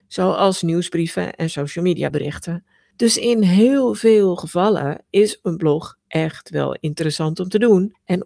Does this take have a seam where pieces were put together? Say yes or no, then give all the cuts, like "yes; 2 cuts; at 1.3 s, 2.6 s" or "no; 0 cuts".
no; 0 cuts